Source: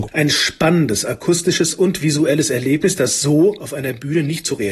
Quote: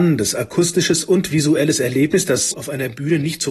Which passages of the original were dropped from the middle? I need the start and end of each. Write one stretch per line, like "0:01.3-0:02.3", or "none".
0:03.2-0:03.6